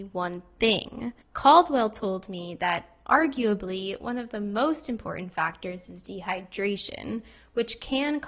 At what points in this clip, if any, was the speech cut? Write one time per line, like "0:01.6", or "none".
0:01.2